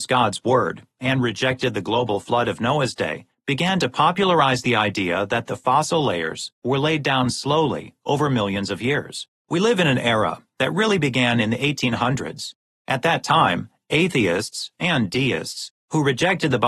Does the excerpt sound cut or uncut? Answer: cut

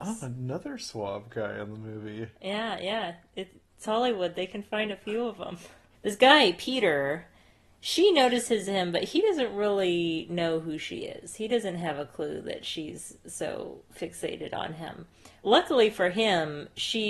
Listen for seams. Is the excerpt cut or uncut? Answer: uncut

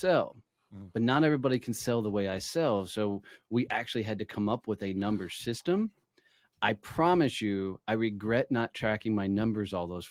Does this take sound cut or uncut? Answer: uncut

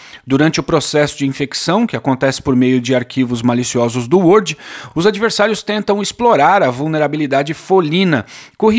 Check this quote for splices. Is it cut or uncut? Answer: uncut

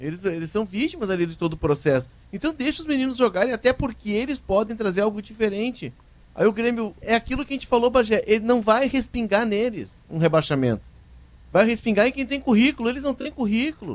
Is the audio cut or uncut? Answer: cut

